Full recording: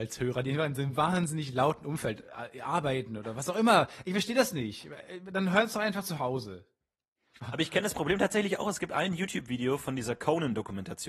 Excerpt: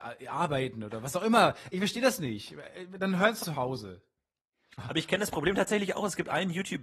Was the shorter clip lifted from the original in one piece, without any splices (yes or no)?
no